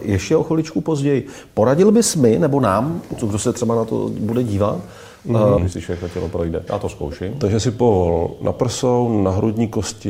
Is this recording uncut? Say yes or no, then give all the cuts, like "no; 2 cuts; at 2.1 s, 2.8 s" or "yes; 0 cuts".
no; 2 cuts; at 5.6 s, 6.7 s